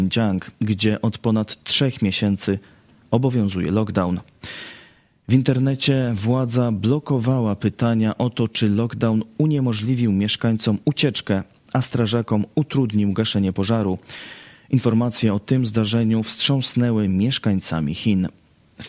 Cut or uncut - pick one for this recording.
uncut